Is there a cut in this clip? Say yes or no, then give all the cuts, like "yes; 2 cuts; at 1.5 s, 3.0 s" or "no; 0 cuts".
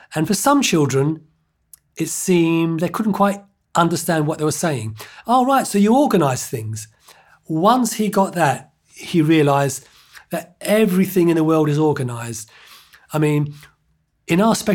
yes; 1 cut; at 5.2 s